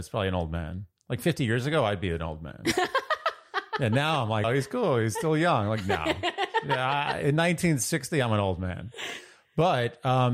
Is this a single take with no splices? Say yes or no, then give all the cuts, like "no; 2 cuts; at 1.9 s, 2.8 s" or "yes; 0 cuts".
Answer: no; 1 cut; at 4.4 s